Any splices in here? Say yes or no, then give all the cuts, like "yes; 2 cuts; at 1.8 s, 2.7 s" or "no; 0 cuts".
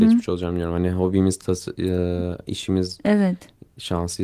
no; 0 cuts